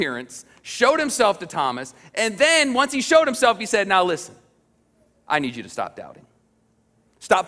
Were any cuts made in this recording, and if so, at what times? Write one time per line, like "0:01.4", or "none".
none